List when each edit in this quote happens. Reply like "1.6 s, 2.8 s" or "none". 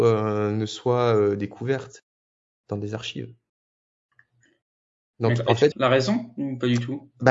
5.7 s